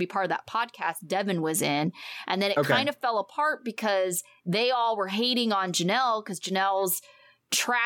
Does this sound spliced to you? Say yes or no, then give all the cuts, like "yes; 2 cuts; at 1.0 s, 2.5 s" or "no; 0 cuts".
no; 0 cuts